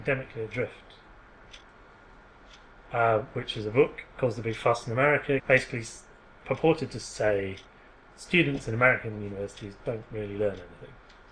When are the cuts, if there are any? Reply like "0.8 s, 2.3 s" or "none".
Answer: 5.4 s

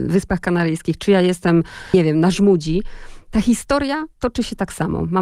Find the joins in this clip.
4.1 s

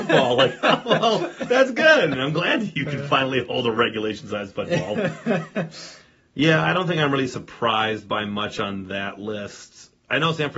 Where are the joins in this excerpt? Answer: 2.1 s

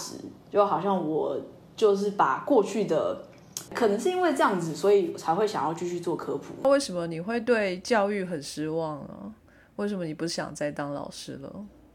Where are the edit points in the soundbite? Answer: 3.7 s

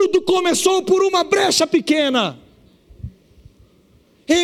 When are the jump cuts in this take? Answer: none

